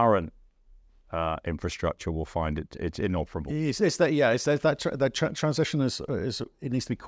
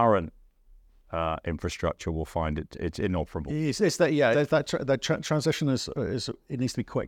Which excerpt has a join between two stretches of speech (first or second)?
second